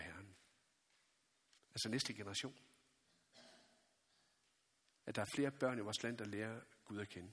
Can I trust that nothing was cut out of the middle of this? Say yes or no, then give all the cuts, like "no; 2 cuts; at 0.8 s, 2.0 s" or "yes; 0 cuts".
no; 1 cut; at 1.6 s